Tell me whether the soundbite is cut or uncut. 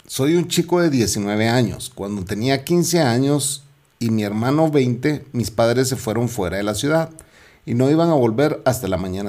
uncut